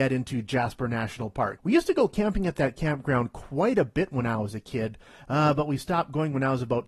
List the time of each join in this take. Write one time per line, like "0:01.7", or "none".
0:01.6